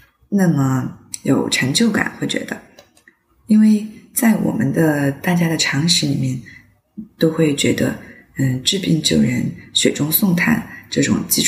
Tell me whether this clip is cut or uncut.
uncut